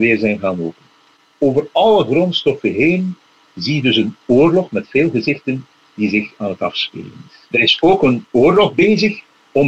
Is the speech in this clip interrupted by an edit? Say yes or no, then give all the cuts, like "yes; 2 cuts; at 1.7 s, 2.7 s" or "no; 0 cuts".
no; 0 cuts